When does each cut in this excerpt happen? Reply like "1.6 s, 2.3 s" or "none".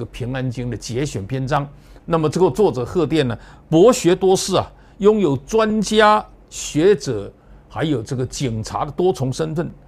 2.0 s